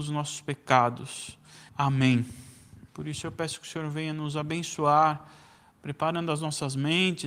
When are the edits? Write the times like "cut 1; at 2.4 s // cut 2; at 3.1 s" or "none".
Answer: cut 1; at 1.7 s // cut 2; at 2.9 s